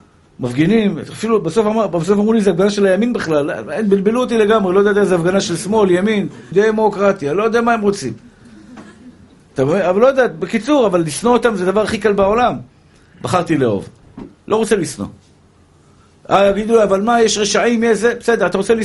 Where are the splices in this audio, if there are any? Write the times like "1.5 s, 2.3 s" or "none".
6.5 s, 14.3 s